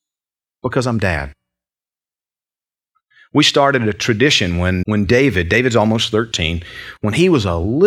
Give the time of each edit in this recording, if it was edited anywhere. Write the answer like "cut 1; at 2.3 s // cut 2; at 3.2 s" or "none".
cut 1; at 4.8 s